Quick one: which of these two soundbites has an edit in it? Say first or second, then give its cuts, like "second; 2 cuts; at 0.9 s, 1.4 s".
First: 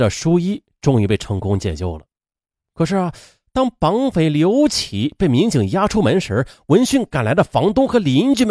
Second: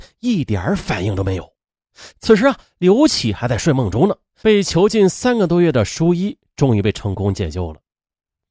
second; 2 cuts; at 2.1 s, 4.4 s